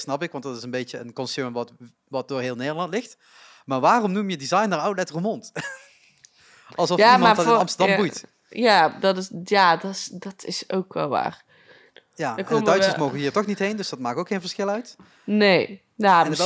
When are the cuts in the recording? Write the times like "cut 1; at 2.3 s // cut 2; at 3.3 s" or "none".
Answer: none